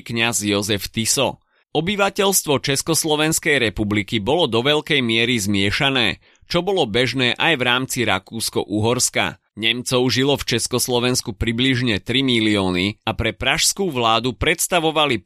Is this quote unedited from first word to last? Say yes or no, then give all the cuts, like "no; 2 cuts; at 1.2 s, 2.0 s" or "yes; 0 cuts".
no; 2 cuts; at 1.6 s, 9.5 s